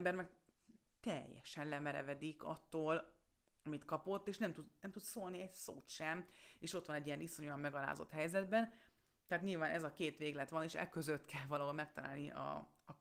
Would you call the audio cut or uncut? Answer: uncut